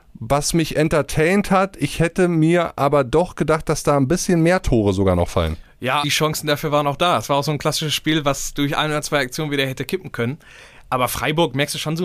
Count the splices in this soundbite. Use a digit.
1